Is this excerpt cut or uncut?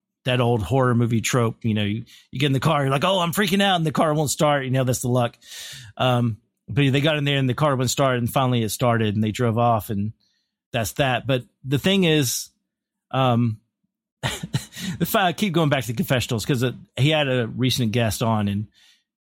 uncut